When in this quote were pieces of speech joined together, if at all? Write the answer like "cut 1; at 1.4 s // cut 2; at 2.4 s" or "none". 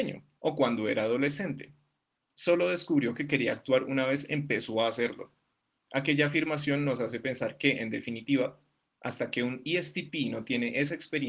none